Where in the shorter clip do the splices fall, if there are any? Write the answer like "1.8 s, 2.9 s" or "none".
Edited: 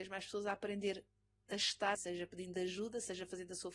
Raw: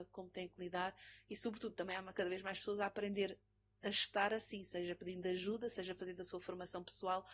2.0 s